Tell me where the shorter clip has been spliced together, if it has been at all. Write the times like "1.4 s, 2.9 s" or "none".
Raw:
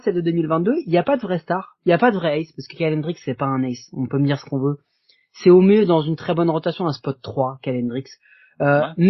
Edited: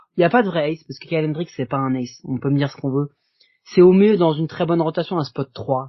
none